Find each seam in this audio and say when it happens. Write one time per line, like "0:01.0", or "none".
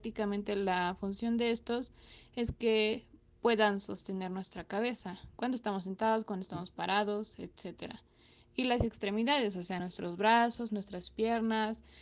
none

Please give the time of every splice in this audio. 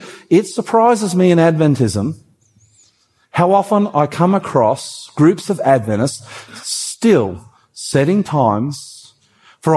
none

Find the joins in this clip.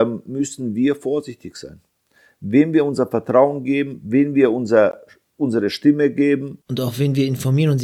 none

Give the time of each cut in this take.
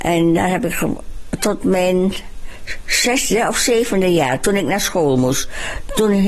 none

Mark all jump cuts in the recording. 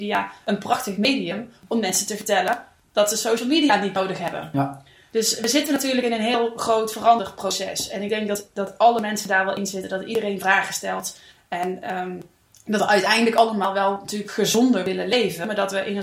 none

